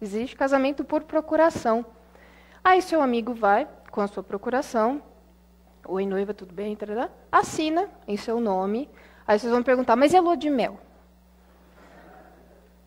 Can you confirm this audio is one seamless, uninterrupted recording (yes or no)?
yes